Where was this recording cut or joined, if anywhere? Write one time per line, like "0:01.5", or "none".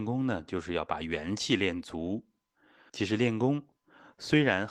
0:02.9